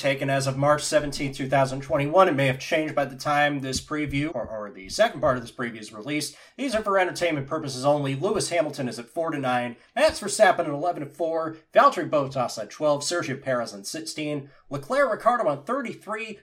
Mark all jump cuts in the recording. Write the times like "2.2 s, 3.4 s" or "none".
4.3 s